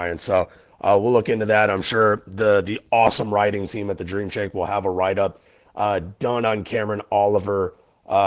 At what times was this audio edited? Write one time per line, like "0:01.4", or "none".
none